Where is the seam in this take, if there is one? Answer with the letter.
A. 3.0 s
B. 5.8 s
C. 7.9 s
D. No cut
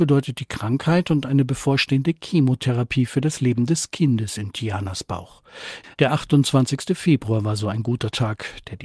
B